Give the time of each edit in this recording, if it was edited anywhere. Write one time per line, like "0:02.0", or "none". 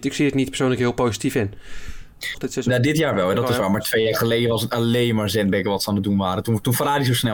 0:02.3